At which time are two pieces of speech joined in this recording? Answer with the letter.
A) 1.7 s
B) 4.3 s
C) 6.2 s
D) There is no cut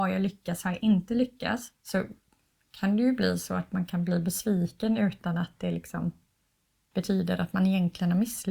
A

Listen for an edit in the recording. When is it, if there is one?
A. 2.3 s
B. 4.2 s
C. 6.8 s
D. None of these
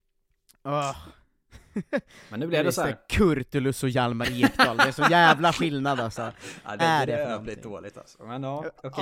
C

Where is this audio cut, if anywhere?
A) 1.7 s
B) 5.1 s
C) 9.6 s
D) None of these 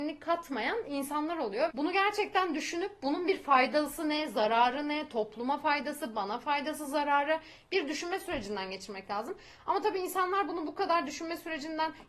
A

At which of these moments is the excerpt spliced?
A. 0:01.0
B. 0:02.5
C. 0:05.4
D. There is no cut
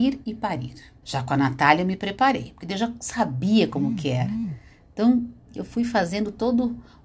A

